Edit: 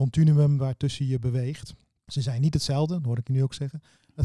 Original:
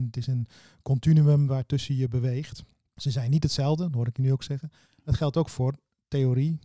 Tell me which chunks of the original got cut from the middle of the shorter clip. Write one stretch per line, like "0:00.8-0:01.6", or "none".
none